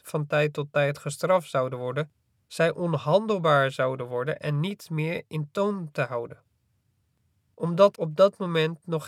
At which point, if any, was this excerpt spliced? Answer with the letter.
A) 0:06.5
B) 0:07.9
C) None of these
B